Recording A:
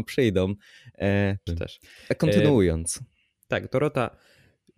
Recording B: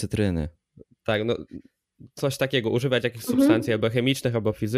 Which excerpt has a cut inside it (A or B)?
A